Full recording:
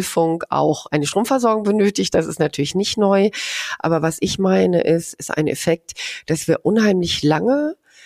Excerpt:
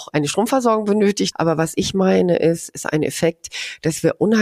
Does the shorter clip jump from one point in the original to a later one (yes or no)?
yes